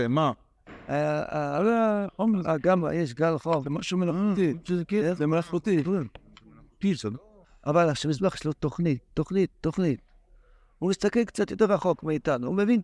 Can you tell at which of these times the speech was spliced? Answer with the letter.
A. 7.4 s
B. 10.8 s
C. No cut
A